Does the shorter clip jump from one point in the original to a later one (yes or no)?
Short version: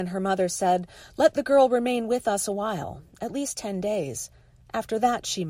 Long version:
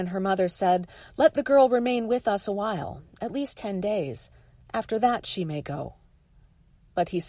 no